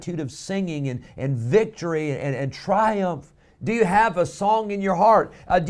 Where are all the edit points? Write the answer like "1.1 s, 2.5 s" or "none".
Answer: 3.5 s